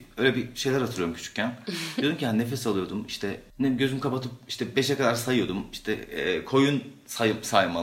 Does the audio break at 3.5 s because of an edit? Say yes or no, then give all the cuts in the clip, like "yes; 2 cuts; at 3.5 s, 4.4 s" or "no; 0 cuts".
yes; 1 cut; at 3.5 s